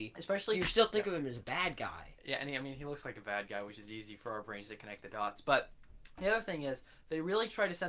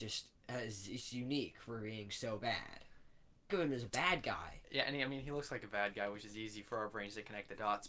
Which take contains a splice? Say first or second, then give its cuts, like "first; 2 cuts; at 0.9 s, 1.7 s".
second; 1 cut; at 3.5 s